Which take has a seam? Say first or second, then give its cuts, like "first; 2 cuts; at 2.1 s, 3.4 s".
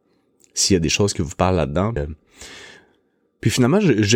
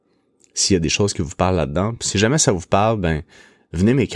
first; 1 cut; at 2.0 s